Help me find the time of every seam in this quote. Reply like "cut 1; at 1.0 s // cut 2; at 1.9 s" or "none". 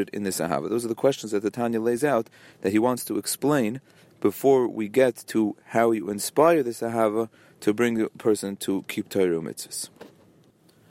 none